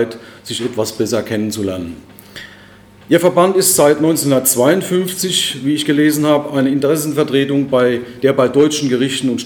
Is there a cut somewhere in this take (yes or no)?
no